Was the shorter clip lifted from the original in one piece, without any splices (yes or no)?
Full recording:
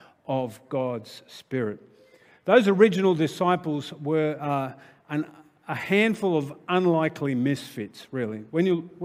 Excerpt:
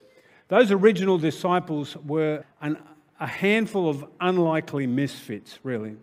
no